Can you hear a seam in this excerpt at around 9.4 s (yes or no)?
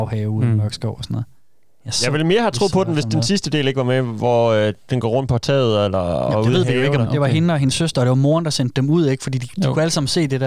no